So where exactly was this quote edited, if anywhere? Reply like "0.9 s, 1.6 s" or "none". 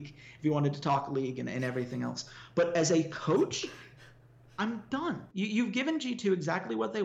5.3 s